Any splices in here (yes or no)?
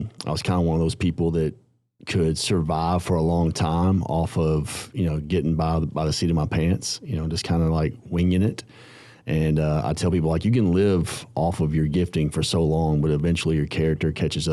no